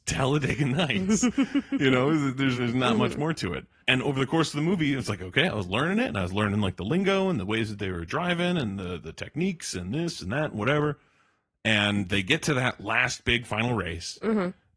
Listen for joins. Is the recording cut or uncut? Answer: cut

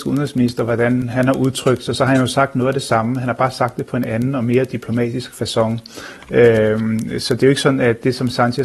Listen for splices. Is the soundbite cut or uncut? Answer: uncut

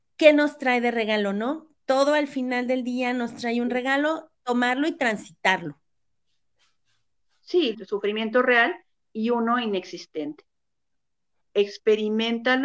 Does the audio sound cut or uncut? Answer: cut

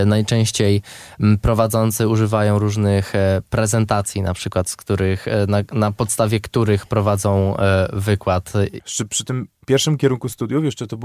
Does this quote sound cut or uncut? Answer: cut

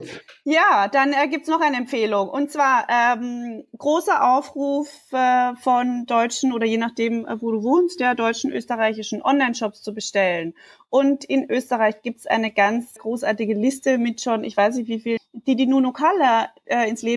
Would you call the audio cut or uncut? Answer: cut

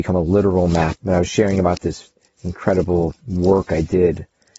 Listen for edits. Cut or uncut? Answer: cut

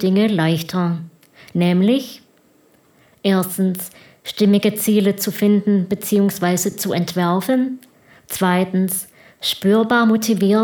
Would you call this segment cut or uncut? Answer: uncut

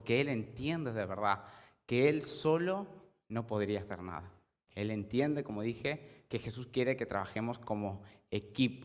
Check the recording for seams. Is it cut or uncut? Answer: uncut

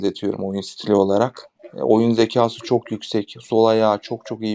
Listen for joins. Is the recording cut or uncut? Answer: uncut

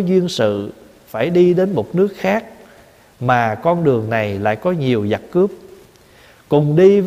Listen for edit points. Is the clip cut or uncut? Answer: uncut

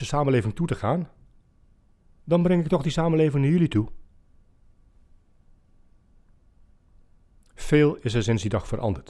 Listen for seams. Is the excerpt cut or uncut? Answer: uncut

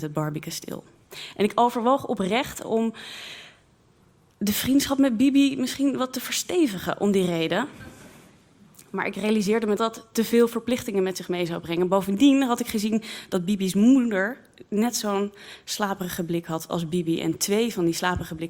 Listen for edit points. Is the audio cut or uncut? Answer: cut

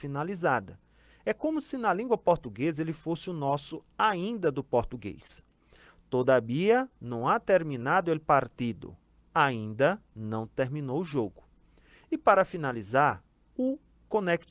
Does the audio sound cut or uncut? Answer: uncut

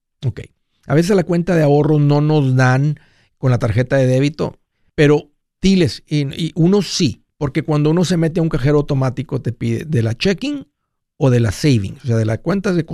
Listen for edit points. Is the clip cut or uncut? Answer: cut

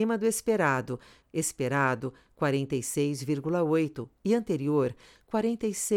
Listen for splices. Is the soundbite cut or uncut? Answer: cut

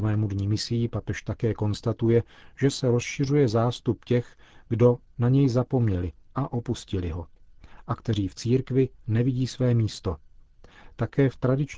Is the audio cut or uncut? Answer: cut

